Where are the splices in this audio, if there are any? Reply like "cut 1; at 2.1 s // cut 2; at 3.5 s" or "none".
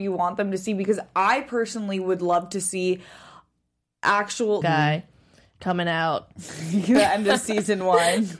cut 1; at 4.6 s